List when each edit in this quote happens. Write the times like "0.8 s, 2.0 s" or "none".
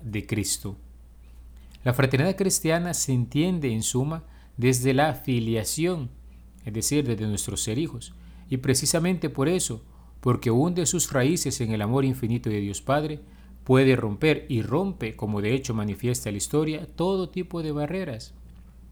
none